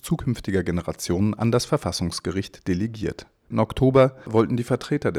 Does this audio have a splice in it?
yes; 1 cut; at 3.5 s

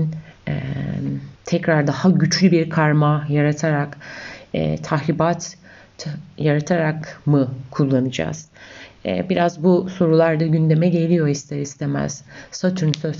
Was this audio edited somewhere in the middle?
yes; 1 cut; at 1.4 s

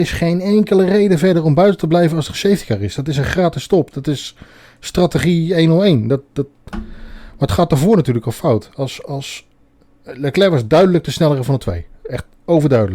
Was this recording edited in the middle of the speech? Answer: yes; 1 cut; at 3.9 s

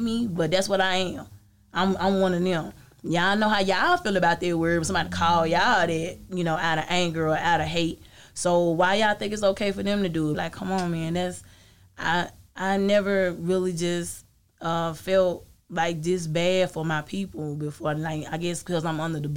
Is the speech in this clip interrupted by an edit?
yes; 1 cut; at 10.3 s

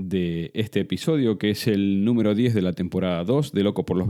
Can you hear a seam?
no; 0 cuts

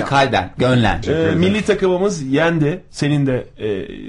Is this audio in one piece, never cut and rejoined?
no; 1 cut; at 1.0 s

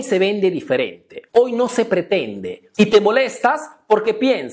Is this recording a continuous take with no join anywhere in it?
no; 1 cut; at 2.7 s

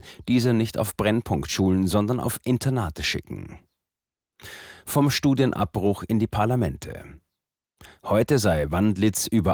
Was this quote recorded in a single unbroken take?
yes; 0 cuts

